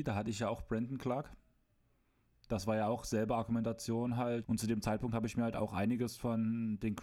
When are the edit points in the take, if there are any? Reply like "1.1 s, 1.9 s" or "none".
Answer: 4.4 s